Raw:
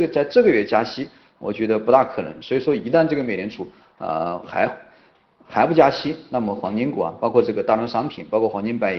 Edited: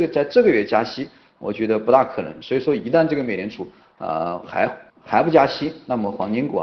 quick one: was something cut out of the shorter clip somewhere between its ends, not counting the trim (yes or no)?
yes